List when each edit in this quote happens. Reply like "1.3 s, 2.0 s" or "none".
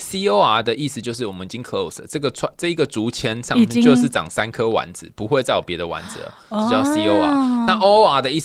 none